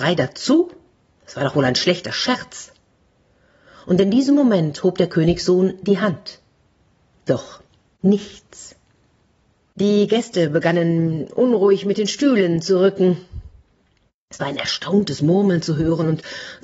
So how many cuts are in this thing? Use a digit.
1